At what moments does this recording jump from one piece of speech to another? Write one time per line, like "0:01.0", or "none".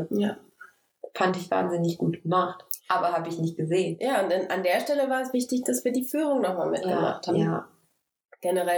0:05.3
0:07.3